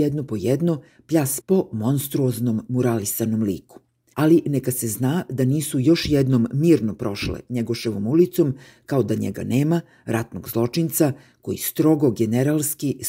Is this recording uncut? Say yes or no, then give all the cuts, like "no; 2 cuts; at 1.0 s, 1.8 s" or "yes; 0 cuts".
no; 2 cuts; at 1.4 s, 4.1 s